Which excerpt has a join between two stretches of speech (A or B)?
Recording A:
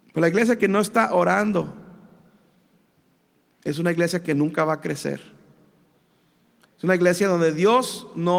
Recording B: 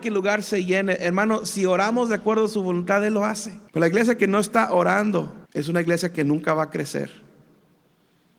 B